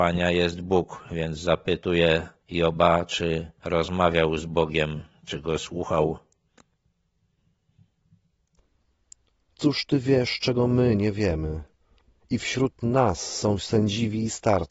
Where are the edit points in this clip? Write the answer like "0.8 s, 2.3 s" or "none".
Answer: 12.2 s